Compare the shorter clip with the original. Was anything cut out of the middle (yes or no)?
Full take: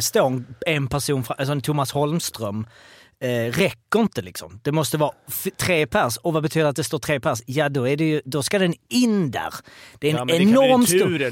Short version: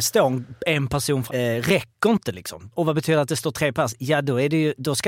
yes